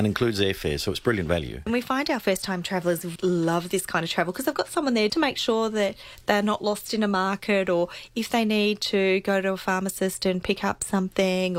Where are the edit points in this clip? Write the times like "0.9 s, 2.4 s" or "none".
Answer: 1.7 s, 3.2 s, 5.1 s